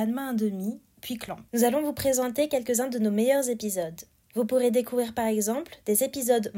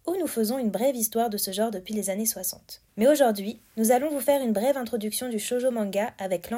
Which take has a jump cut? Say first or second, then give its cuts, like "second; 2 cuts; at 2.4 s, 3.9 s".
first; 1 cut; at 1.5 s